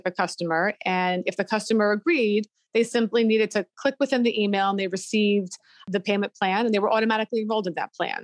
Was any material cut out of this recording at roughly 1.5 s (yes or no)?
no